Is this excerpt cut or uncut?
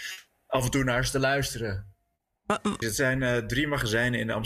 cut